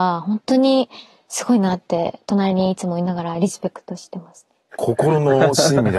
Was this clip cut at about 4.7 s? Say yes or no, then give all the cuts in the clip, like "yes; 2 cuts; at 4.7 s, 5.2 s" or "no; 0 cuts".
yes; 1 cut; at 4.7 s